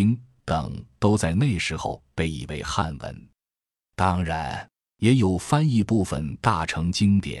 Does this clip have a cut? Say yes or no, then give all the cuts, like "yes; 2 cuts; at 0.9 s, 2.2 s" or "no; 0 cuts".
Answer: no; 0 cuts